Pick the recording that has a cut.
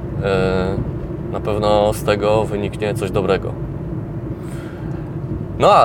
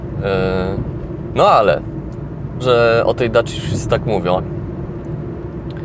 second; 3 cuts; at 1.3 s, 2.6 s, 4.4 s

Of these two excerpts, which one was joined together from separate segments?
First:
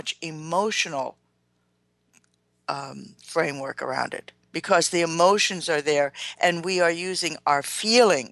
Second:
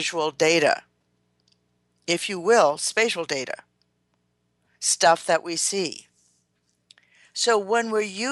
first; 1 cut; at 4.4 s

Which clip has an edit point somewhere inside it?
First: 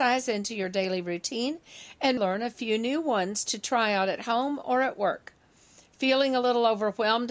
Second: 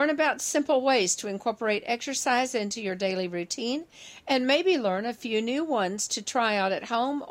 first; 1 cut; at 2.2 s

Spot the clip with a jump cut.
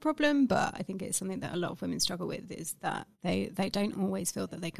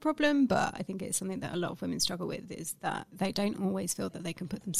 second; 1 cut; at 3.1 s

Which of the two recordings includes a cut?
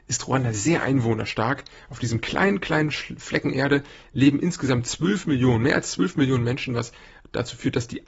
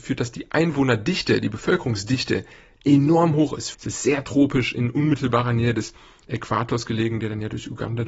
second; 1 cut; at 3.7 s

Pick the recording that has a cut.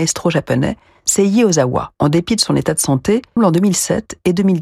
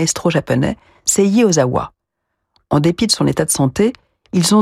first; 2 cuts; at 1.9 s, 3.4 s

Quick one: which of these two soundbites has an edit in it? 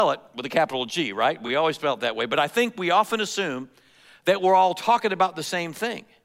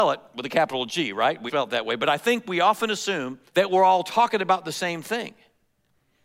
second; 2 cuts; at 1.5 s, 3.5 s

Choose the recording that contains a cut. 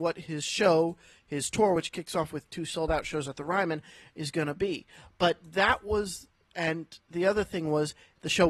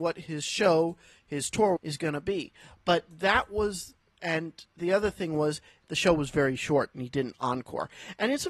second; 1 cut; at 1.8 s

